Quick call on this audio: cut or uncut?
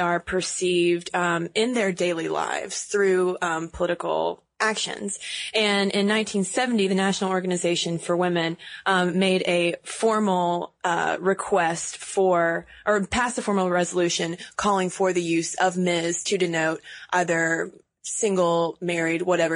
uncut